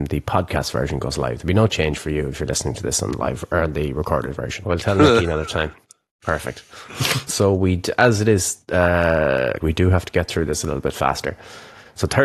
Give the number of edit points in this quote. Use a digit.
3